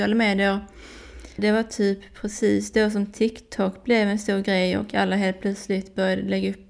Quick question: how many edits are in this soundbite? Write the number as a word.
one